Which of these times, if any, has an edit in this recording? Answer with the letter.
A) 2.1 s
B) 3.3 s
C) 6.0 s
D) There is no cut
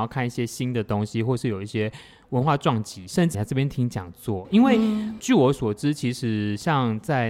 B